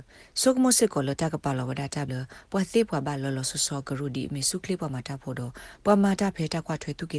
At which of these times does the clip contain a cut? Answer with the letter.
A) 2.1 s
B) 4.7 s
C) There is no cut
A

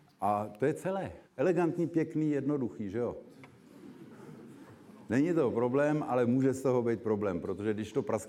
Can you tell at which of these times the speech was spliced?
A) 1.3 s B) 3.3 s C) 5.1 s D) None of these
A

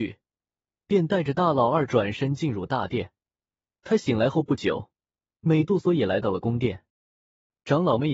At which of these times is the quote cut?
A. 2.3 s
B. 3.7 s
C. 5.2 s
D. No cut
B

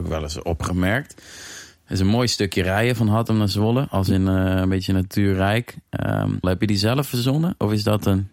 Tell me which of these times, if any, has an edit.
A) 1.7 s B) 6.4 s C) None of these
B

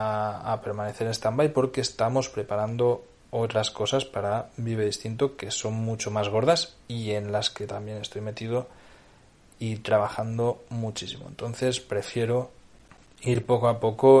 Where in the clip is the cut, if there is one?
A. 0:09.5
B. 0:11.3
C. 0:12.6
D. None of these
D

